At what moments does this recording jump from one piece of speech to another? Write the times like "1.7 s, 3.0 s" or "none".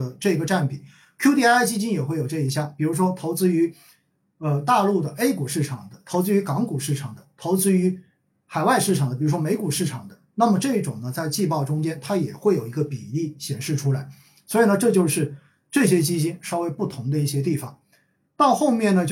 none